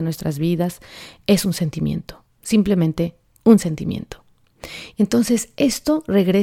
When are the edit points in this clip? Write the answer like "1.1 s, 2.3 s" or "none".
2.3 s, 4.9 s